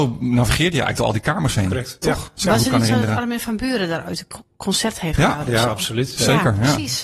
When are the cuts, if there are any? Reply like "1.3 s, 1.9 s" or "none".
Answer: none